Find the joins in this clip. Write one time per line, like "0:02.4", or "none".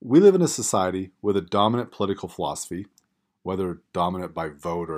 none